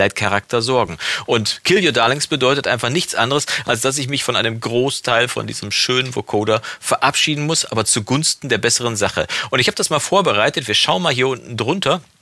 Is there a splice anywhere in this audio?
no; 0 cuts

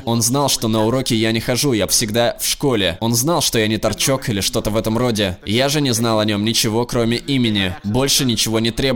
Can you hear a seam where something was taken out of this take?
yes; 1 cut; at 1.9 s

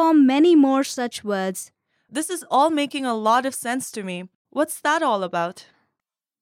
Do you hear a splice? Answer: yes; 1 cut; at 4.4 s

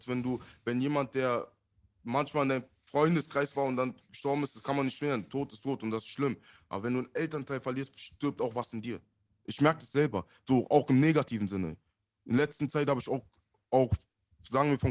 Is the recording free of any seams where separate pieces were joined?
yes; 0 cuts

